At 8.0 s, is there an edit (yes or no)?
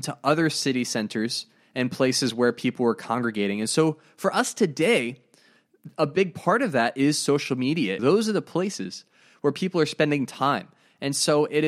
yes